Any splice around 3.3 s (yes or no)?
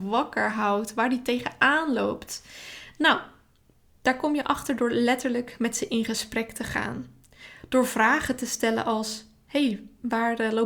no